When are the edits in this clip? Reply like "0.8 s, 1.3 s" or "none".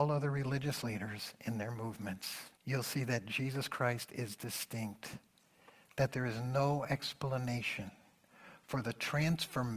2.6 s